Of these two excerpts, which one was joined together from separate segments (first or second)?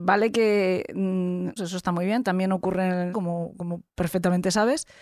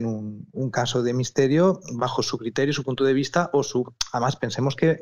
first